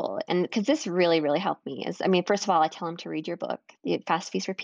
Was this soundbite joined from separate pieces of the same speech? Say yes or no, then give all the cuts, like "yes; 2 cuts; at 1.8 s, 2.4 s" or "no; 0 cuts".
no; 0 cuts